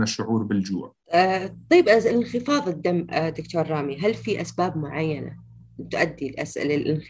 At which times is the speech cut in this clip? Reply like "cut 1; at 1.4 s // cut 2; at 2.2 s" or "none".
cut 1; at 1.0 s